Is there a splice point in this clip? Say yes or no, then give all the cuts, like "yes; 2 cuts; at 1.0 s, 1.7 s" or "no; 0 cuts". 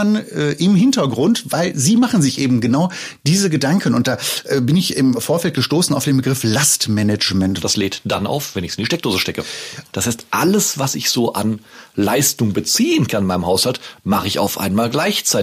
yes; 2 cuts; at 7.6 s, 9.9 s